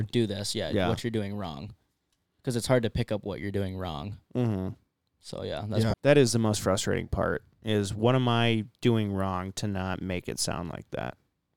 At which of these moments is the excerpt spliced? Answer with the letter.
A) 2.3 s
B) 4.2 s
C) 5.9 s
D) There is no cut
C